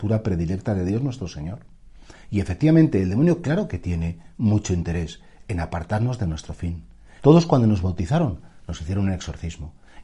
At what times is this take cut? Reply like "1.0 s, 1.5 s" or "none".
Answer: 7.2 s